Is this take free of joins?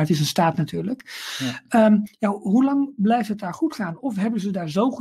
yes; 0 cuts

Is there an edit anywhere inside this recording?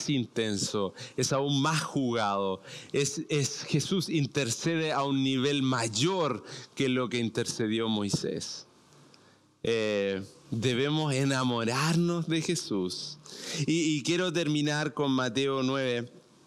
no; 0 cuts

